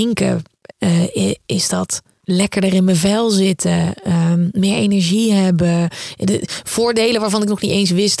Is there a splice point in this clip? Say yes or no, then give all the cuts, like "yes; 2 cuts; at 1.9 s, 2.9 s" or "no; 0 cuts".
no; 0 cuts